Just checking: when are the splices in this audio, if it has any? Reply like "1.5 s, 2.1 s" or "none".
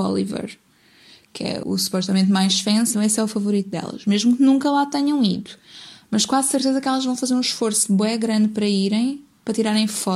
1.6 s, 2.9 s